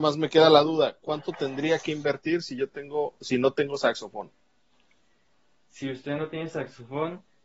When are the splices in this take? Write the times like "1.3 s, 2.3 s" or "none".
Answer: none